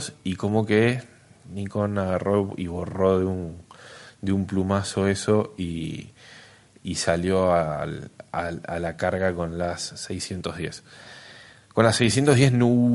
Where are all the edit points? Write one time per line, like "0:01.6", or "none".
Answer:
none